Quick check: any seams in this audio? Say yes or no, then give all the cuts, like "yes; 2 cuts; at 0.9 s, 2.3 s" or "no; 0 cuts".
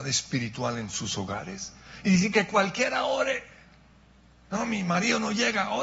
no; 0 cuts